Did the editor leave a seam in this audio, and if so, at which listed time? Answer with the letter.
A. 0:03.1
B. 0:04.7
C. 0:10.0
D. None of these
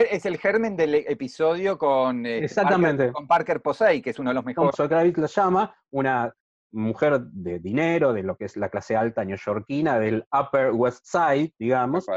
B